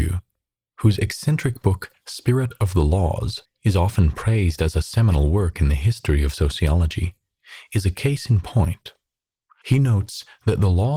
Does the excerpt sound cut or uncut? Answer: cut